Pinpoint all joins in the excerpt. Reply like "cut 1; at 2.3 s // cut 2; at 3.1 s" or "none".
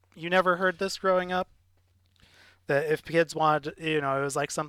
none